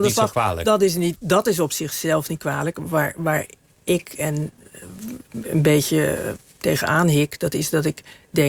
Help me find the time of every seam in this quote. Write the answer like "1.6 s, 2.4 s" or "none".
none